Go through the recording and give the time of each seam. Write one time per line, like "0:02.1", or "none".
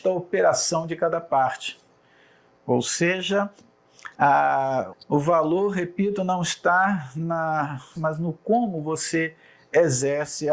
0:04.9
0:08.0